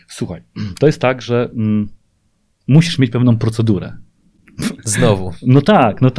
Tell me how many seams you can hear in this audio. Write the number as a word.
zero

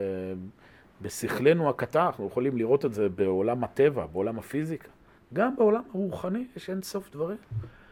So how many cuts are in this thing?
one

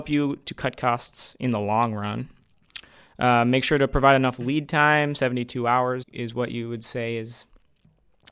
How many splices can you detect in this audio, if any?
one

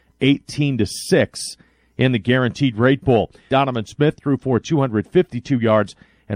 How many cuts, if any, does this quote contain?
one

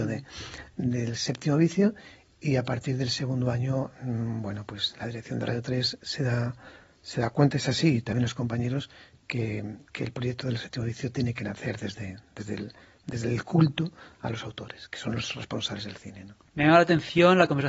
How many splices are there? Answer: zero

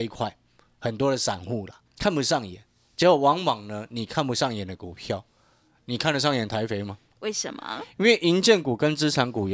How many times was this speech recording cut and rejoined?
two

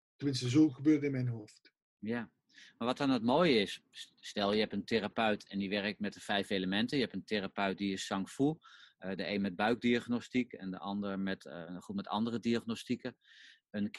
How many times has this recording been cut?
zero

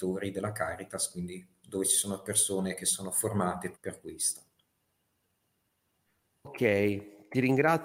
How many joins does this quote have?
one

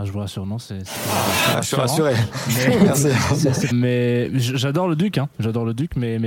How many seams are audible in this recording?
one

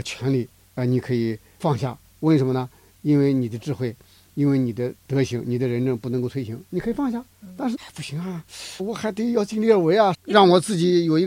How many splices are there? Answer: three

